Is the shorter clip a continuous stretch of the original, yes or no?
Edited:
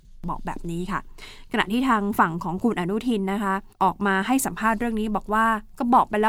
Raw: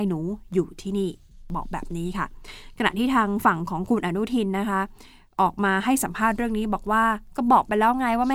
no